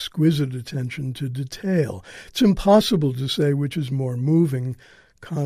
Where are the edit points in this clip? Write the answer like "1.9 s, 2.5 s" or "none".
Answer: none